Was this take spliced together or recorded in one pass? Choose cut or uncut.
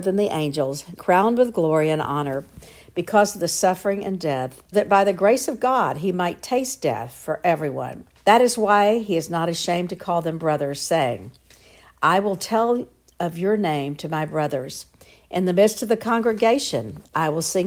cut